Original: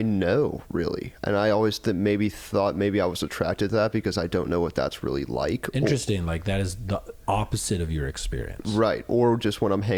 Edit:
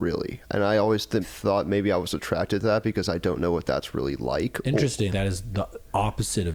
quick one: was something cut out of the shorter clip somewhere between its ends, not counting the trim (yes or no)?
yes